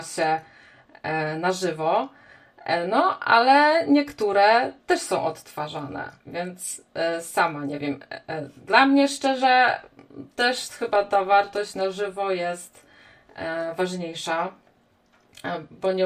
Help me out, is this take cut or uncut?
cut